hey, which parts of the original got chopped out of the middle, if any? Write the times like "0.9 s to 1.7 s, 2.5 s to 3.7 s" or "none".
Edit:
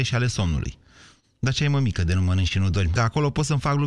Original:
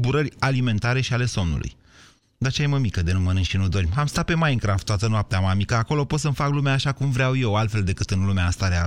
3.9 s to 5.7 s